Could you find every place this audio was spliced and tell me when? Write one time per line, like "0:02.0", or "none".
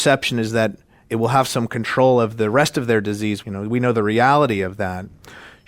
0:03.4